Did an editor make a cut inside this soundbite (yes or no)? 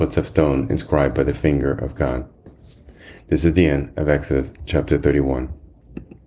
no